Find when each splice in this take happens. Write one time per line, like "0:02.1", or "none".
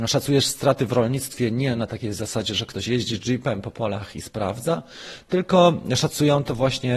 none